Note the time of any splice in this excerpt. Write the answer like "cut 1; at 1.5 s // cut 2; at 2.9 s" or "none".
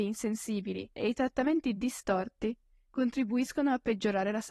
cut 1; at 0.9 s

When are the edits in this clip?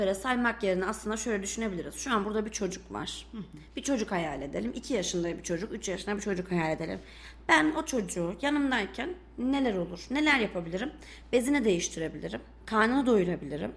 none

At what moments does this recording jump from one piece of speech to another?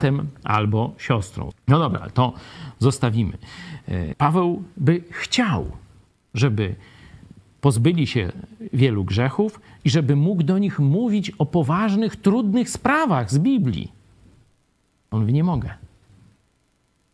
cut 1; at 1.5 s // cut 2; at 4.1 s // cut 3; at 6.3 s

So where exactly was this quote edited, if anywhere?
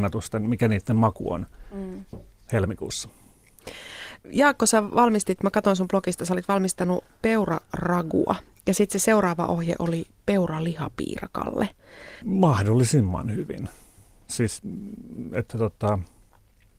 cut 1; at 12.2 s

